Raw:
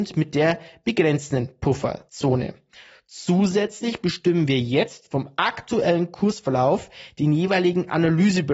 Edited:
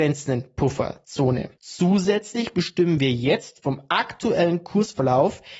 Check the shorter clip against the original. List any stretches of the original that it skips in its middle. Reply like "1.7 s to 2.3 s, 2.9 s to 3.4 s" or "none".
2.6 s to 3.0 s